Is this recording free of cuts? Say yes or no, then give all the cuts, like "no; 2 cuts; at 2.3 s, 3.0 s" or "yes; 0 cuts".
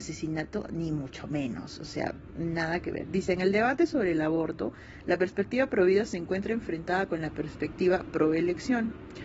yes; 0 cuts